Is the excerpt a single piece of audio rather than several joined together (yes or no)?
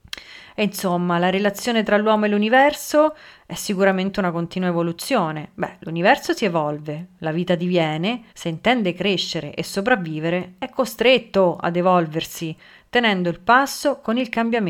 no